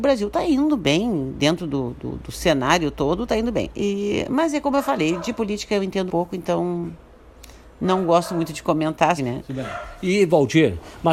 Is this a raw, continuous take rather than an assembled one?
no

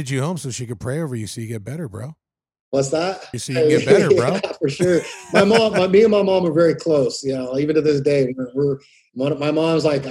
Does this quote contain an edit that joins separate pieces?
yes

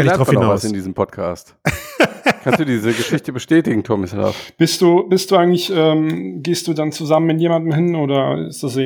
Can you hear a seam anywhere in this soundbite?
no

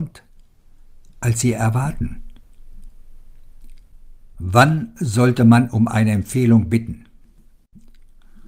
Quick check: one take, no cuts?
no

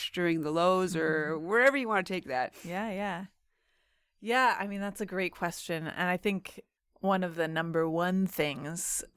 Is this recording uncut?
yes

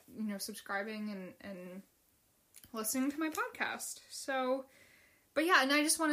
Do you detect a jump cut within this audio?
no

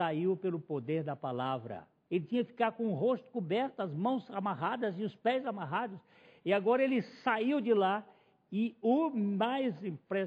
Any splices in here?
yes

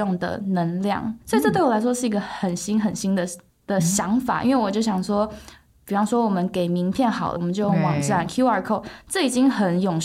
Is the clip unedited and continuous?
no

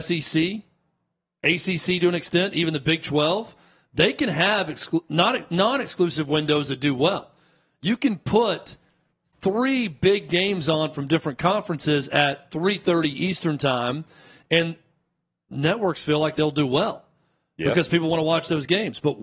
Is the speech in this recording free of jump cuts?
yes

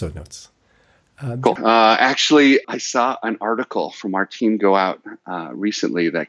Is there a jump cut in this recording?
yes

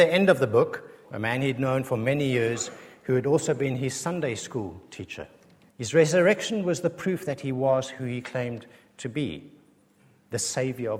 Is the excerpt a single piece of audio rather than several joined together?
no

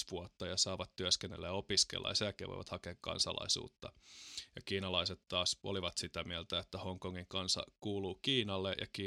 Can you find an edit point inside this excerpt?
no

